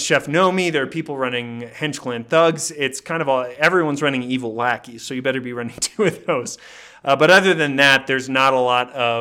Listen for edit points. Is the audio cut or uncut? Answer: uncut